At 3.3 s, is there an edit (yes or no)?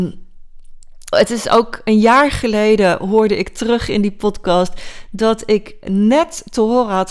no